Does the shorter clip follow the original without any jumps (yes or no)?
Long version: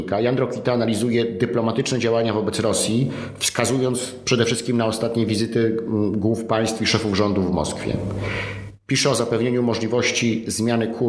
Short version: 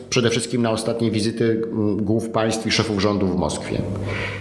yes